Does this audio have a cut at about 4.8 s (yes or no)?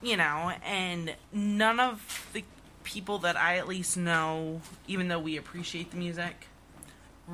no